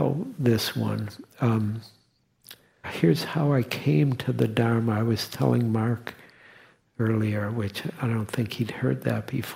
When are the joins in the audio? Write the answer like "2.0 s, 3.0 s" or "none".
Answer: 2.8 s

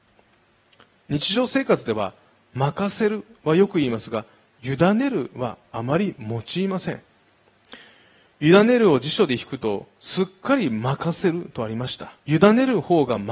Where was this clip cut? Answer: 12.2 s

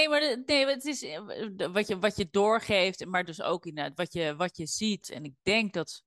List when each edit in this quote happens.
5.0 s

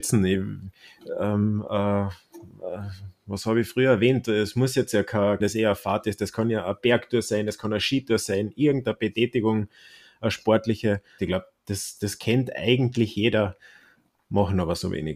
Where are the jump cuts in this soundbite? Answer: 5.4 s, 11.2 s

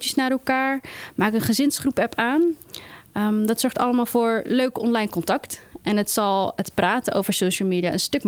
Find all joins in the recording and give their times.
none

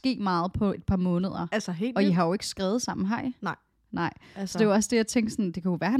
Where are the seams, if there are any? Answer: none

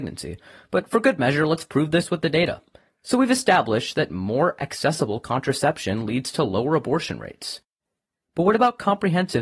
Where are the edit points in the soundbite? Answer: 2.9 s

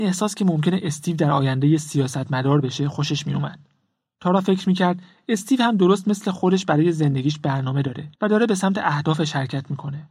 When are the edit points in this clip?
4.2 s, 8.2 s

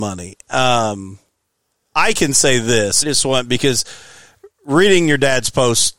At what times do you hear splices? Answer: 3.0 s, 4.5 s

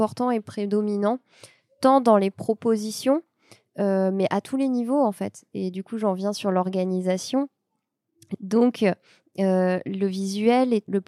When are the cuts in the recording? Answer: none

